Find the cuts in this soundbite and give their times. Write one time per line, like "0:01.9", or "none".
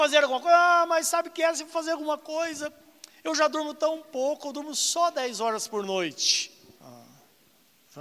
0:06.8